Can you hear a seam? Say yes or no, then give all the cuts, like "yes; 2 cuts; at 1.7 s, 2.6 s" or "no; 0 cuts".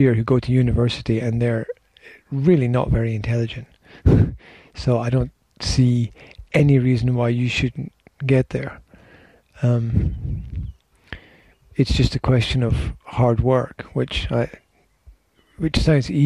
no; 0 cuts